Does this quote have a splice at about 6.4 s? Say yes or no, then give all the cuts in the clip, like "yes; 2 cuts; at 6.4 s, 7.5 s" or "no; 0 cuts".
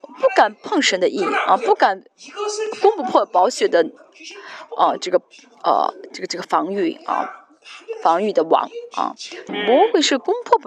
yes; 2 cuts; at 6.4 s, 9.5 s